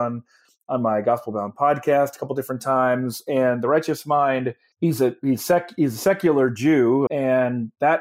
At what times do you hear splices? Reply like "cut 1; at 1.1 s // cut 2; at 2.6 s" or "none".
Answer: cut 1; at 7.1 s